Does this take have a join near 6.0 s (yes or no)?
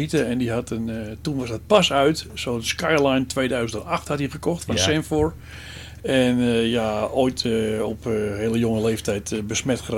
yes